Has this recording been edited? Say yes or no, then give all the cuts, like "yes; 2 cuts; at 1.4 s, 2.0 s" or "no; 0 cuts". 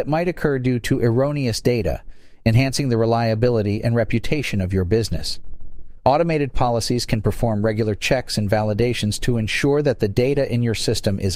yes; 1 cut; at 6.0 s